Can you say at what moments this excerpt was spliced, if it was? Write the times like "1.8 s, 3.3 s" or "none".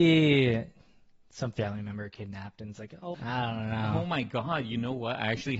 3.1 s